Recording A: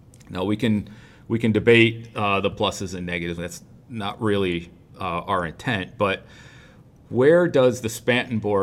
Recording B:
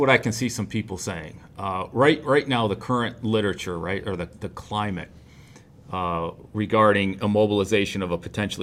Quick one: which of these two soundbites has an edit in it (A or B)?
A